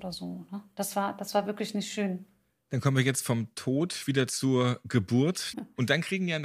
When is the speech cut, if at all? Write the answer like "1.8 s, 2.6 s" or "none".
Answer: 5.5 s

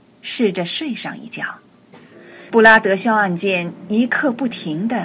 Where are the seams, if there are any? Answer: 2.5 s

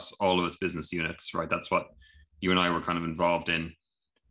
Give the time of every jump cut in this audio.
none

